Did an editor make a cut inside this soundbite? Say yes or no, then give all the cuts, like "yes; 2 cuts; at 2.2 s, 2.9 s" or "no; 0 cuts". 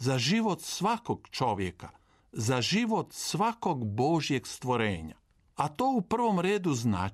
yes; 1 cut; at 5.5 s